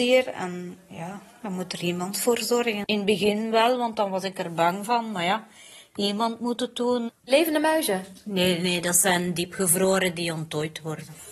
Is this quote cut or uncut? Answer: cut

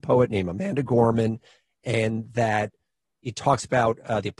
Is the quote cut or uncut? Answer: uncut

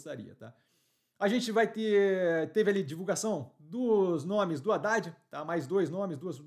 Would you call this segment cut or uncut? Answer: uncut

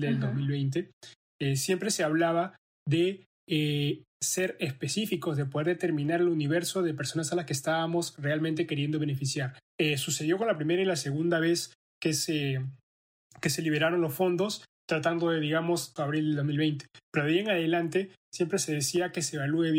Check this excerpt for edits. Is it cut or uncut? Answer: cut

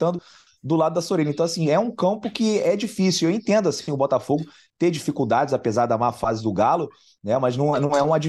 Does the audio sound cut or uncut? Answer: uncut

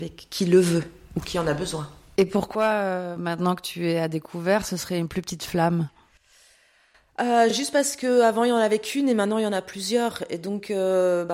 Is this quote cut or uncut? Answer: uncut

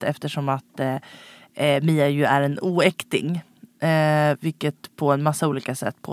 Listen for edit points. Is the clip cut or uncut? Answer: uncut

